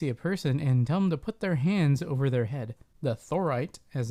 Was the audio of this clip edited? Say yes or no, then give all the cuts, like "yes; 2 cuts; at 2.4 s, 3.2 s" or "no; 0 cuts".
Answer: yes; 1 cut; at 2.9 s